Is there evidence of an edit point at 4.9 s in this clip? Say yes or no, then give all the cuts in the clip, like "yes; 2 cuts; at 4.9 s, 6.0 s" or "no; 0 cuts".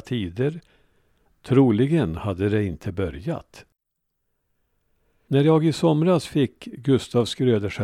no; 1 cut; at 1.3 s